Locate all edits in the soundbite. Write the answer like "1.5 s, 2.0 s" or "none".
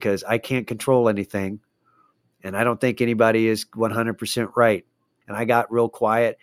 5.2 s